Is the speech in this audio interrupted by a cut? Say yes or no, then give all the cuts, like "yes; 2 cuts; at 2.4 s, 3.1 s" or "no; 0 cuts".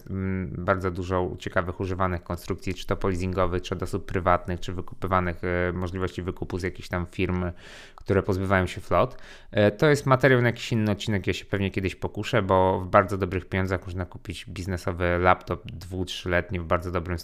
no; 0 cuts